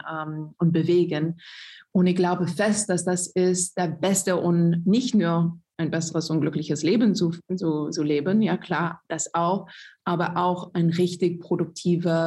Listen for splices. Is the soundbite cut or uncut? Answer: uncut